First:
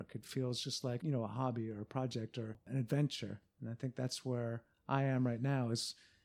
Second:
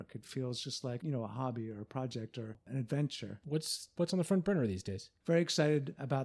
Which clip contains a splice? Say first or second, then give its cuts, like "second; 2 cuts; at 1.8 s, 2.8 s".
second; 2 cuts; at 3.4 s, 5.2 s